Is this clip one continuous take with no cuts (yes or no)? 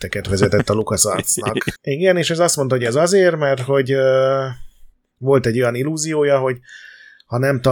no